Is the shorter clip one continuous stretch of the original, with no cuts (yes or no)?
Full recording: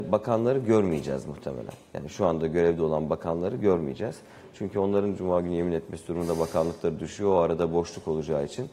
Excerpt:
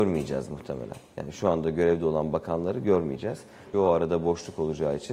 no